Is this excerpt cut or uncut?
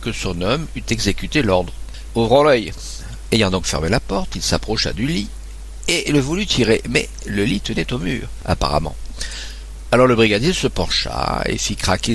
cut